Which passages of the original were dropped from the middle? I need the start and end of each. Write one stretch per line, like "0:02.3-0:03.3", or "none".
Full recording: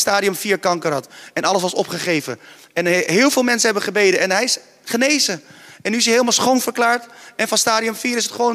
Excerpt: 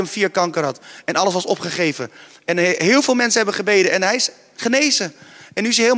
none